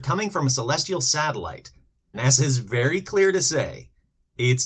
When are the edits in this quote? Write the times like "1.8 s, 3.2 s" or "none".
2.1 s